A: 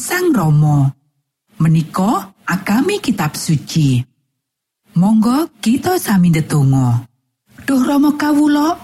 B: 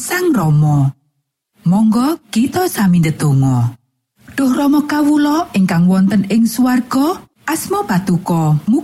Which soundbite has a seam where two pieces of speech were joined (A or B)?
B